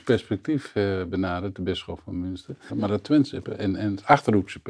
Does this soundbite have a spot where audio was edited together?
yes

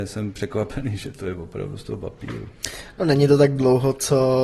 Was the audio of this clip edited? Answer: no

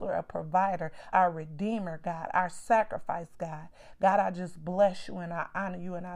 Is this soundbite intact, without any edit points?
no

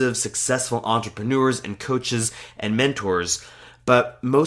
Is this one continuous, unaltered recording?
yes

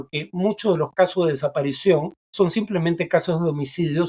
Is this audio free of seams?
no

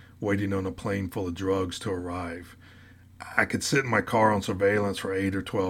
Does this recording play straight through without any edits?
yes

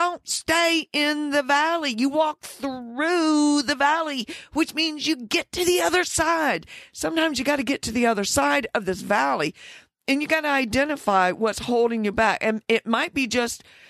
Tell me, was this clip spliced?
no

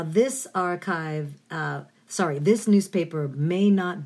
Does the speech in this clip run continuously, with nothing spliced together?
yes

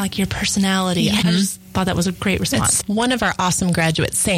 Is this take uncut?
no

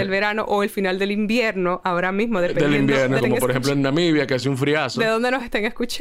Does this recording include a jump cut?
yes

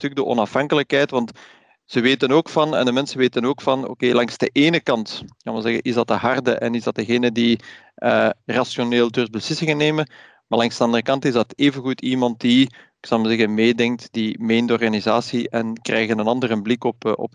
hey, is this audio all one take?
yes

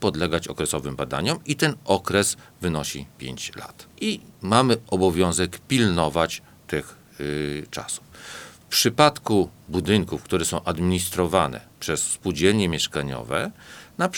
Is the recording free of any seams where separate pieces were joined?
no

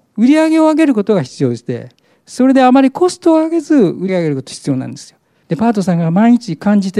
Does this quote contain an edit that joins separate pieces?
yes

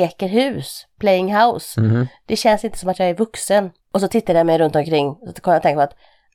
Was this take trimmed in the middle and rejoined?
yes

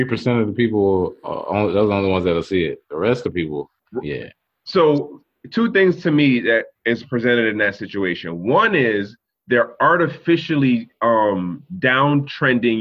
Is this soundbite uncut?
yes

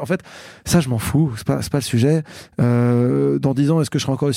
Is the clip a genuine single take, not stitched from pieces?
yes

